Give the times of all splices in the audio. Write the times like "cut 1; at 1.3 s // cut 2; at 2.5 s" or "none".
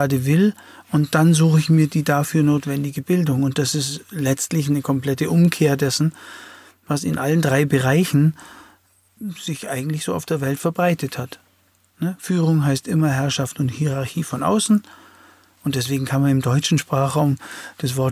none

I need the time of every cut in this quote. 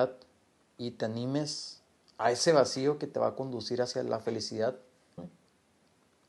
cut 1; at 5.2 s

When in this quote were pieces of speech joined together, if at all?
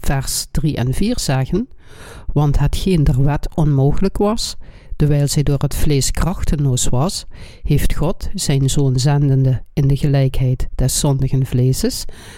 none

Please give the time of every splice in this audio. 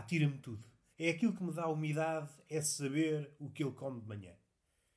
cut 1; at 0.9 s

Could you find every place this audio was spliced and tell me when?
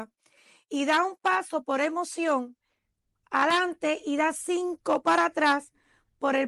none

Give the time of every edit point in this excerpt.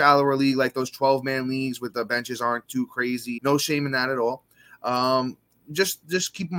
cut 1; at 3.4 s

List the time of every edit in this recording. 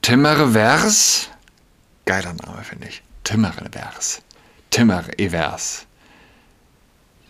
none

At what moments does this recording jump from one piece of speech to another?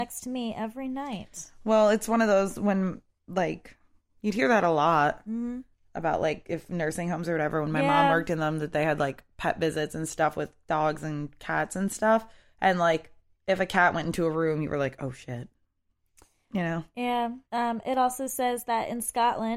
cut 1; at 17.5 s

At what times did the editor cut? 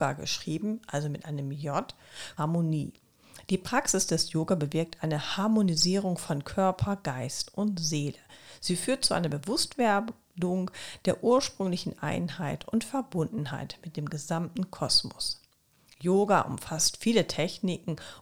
cut 1; at 2.4 s

